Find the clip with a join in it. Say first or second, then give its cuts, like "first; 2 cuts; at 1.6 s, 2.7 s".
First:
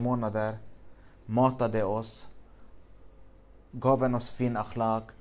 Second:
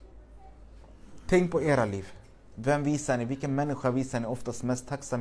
first; 1 cut; at 3.7 s